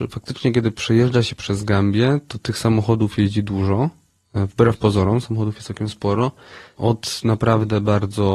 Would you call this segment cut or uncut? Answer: cut